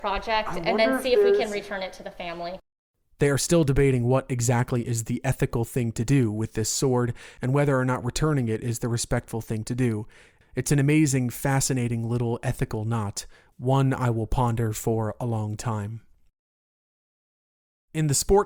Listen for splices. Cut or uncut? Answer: uncut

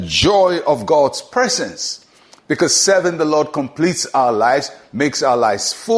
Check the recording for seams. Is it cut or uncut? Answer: cut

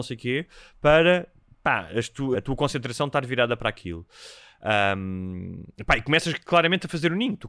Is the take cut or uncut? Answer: cut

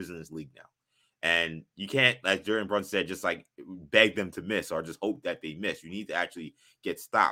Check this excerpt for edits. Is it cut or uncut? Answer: uncut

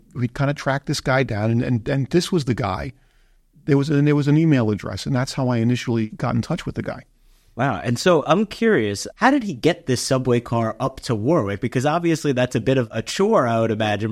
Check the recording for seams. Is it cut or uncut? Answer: uncut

